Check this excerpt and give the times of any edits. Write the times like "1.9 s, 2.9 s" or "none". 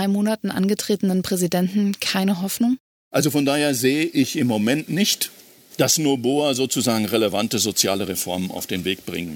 none